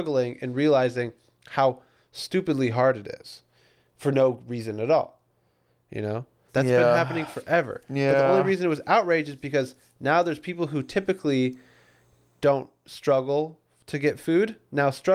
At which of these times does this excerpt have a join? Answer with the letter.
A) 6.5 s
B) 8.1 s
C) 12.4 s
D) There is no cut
A